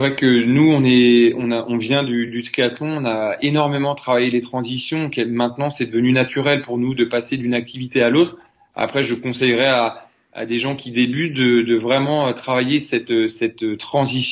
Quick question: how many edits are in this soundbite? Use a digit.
0